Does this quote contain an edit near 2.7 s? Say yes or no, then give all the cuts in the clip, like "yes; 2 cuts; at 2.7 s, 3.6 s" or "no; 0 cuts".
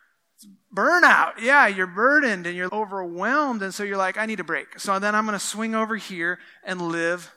yes; 1 cut; at 2.7 s